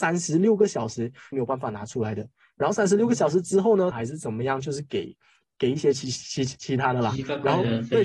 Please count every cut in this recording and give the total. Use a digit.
2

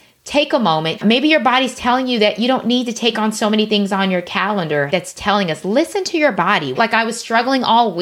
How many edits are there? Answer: 3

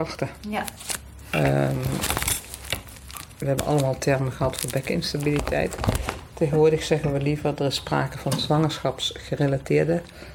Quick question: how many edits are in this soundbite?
1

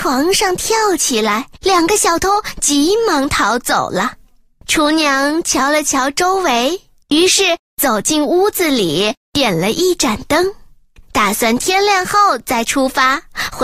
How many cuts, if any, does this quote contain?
3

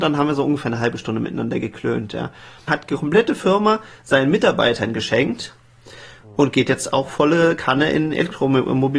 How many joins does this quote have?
1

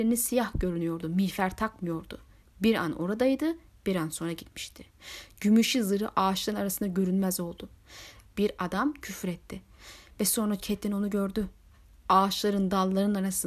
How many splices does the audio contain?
1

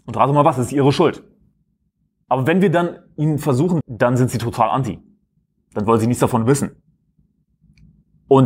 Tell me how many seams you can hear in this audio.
1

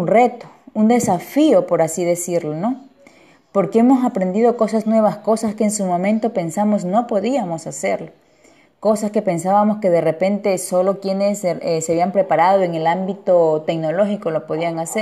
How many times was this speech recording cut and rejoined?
0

